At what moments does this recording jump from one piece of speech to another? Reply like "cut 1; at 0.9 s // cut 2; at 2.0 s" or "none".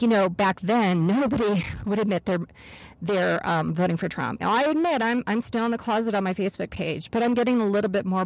cut 1; at 4.4 s